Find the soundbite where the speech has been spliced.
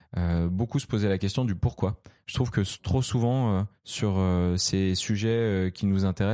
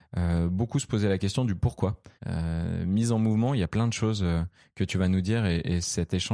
second; 1 cut; at 2.2 s

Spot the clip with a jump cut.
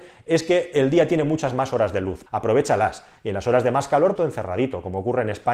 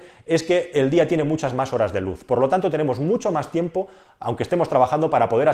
first; 2 cuts; at 2.3 s, 4.2 s

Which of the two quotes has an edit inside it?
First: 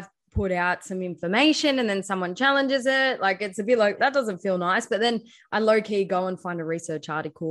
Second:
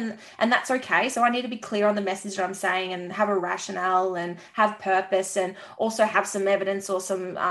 first; 1 cut; at 4.0 s

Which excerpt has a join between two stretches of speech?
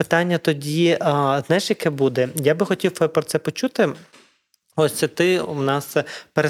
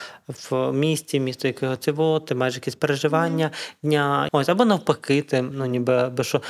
second; 1 cut; at 4.3 s

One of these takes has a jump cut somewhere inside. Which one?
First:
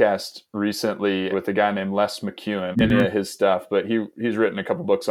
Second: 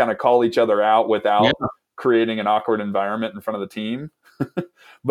first; 2 cuts; at 1.3 s, 2.7 s

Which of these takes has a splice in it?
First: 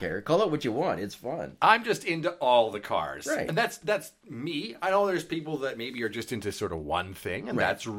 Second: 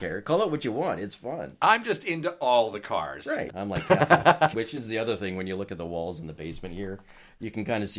second; 2 cuts; at 3.5 s, 4.5 s

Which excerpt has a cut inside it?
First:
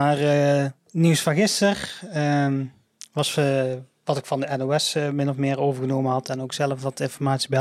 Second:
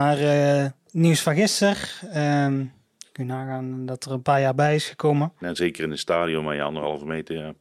second; 2 cuts; at 3.0 s, 5.4 s

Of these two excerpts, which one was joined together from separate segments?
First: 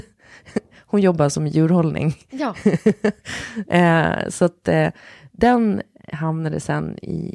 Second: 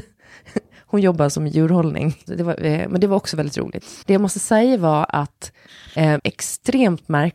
second; 3 cuts; at 2.3 s, 4.0 s, 6.2 s

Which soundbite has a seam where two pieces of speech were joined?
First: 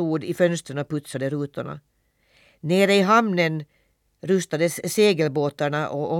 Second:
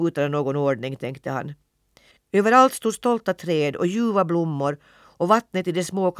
second; 1 cut; at 2.1 s

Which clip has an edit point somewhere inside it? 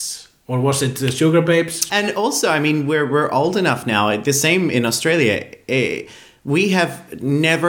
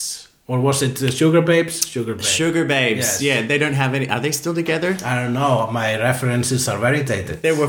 first; 1 cut; at 1.9 s

